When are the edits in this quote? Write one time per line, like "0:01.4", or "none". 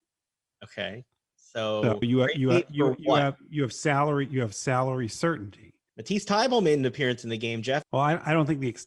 0:02.0
0:05.9
0:07.8